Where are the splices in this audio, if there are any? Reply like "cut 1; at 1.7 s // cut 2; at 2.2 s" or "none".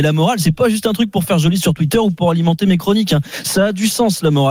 none